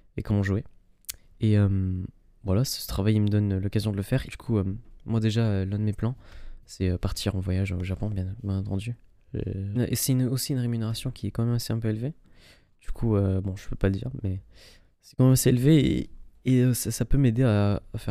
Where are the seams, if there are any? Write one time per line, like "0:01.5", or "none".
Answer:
0:04.3
0:09.8